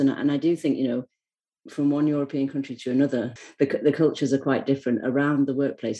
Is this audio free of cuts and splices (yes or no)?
no